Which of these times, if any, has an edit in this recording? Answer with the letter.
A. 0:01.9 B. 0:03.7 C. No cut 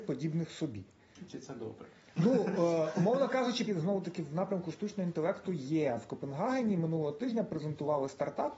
B